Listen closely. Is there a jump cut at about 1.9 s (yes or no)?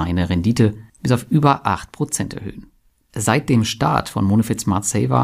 no